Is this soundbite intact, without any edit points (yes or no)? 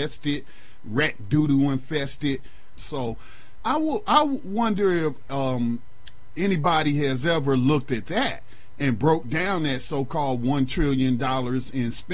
no